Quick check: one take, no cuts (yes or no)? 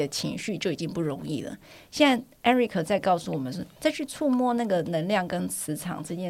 yes